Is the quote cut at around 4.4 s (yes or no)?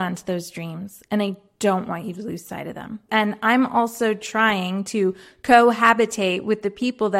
no